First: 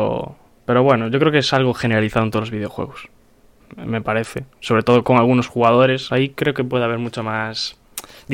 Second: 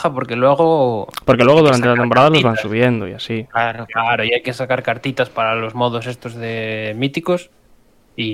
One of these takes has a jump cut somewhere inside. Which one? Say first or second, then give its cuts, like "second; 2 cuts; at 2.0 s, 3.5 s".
first; 3 cuts; at 3.6 s, 5.0 s, 6.1 s